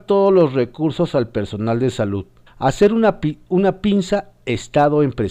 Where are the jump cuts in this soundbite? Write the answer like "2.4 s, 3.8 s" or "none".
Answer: 2.5 s

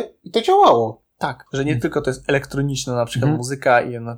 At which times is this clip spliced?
1.5 s

